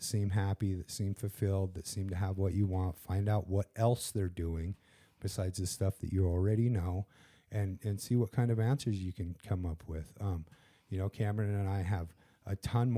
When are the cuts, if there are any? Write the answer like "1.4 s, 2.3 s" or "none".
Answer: none